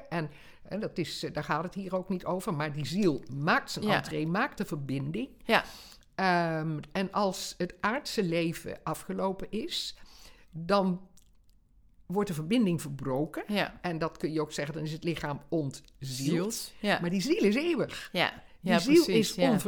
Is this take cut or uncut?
uncut